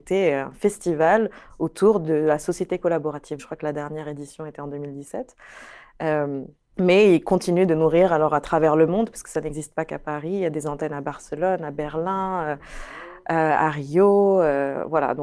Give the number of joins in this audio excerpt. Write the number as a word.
one